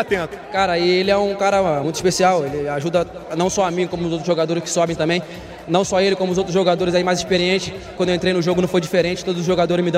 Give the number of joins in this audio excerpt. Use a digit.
2